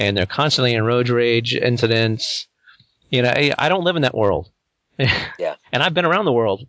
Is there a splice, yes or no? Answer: no